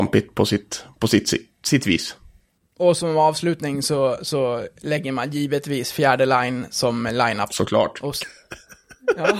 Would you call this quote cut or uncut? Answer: cut